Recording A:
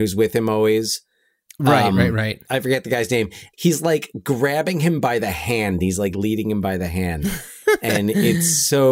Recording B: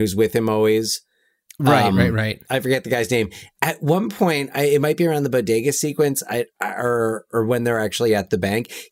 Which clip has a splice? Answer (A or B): A